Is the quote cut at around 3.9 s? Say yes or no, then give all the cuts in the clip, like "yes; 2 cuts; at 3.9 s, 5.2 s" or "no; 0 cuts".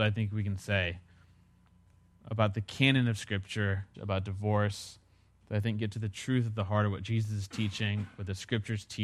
yes; 1 cut; at 3.9 s